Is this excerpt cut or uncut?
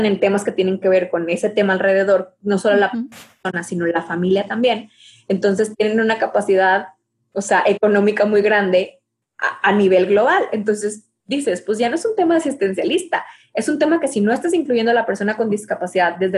uncut